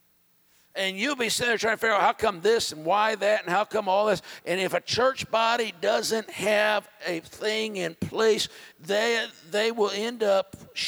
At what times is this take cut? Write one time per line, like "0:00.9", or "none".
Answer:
0:04.4
0:08.7